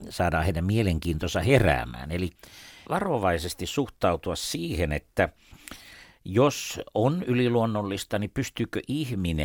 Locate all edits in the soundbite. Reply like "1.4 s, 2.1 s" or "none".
2.9 s